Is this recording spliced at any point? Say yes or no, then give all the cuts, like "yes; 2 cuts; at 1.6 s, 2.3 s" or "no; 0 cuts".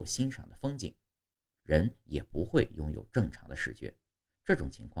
yes; 1 cut; at 1.6 s